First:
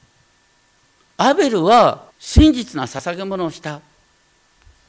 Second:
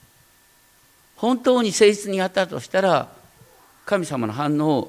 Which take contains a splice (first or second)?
first